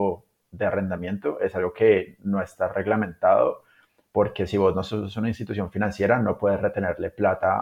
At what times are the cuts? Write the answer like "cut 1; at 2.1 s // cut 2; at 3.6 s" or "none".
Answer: none